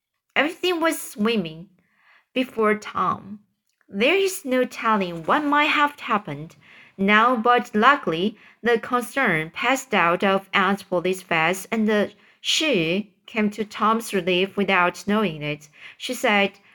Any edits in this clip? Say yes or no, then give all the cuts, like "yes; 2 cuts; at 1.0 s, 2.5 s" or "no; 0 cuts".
no; 0 cuts